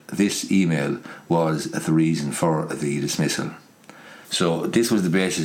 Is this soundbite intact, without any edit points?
no; 1 cut; at 4.2 s

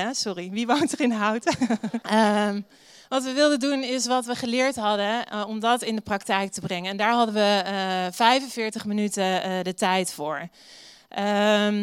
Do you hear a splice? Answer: yes; 1 cut; at 2.0 s

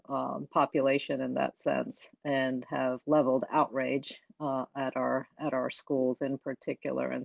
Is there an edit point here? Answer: no; 0 cuts

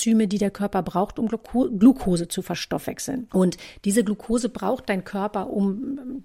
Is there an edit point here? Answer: yes; 1 cut; at 3.3 s

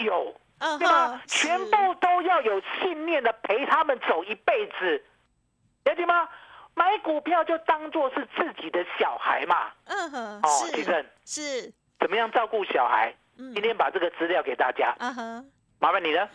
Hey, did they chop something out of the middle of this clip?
no; 0 cuts

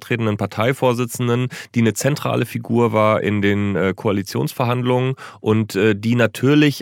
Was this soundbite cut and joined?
no; 0 cuts

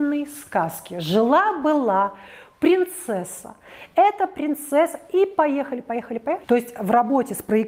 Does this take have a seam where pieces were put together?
yes; 1 cut; at 6.4 s

